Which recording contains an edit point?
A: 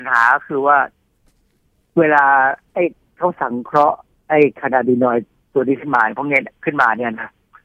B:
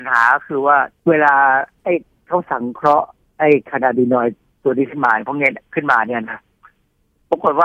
B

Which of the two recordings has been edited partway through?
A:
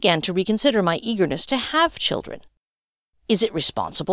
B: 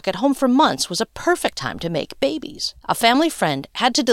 B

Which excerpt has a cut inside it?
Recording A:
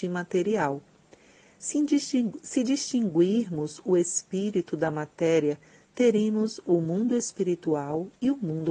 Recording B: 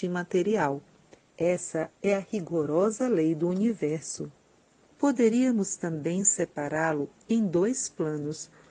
B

